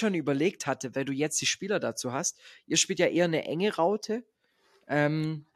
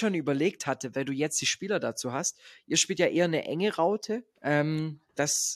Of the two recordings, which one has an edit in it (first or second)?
second